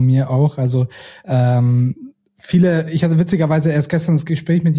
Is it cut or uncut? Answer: uncut